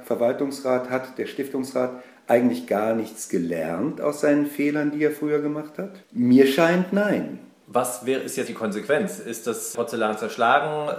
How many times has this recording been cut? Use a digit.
2